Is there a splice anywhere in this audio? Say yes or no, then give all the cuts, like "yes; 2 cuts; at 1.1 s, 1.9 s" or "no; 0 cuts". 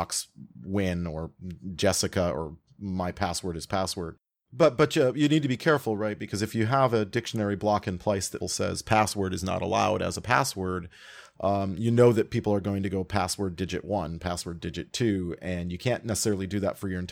yes; 1 cut; at 8.4 s